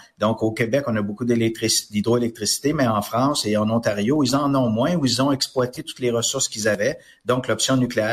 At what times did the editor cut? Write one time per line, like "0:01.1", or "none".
none